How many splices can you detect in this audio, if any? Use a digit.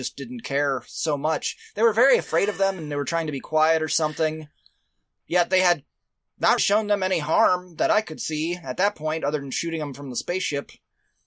1